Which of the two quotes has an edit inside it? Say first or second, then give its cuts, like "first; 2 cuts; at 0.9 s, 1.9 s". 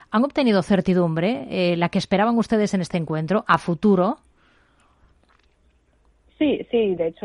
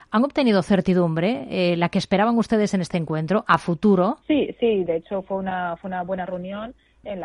second; 1 cut; at 4.2 s